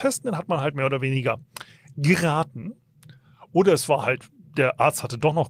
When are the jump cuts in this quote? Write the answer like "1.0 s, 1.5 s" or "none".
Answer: none